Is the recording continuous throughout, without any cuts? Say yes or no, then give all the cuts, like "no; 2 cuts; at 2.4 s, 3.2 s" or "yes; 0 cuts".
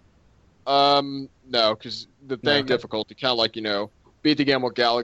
no; 1 cut; at 2.7 s